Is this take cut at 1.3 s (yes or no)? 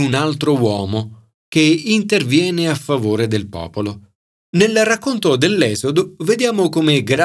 yes